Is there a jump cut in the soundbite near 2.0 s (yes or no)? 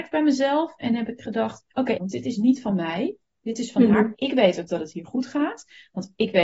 yes